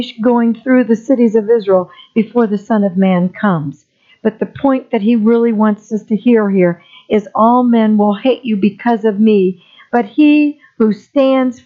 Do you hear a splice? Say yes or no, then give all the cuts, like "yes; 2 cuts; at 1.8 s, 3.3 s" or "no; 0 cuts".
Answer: no; 0 cuts